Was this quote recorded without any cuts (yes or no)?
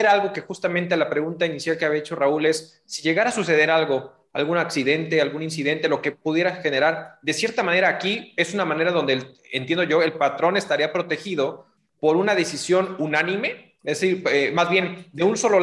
yes